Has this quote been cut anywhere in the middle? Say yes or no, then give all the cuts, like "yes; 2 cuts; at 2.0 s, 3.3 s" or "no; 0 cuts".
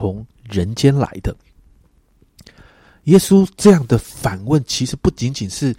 no; 0 cuts